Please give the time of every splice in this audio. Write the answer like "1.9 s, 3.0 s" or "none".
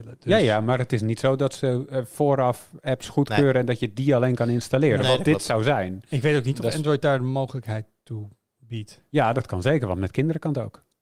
none